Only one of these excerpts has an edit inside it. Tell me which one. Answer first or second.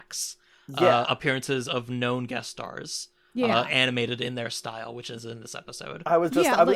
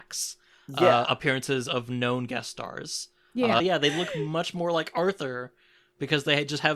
second